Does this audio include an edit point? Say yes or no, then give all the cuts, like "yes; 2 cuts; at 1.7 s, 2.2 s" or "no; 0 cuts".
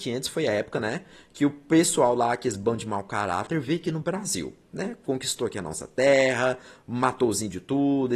no; 0 cuts